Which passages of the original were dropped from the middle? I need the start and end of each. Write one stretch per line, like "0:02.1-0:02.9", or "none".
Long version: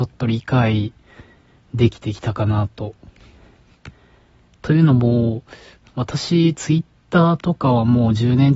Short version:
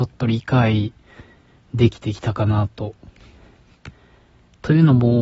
none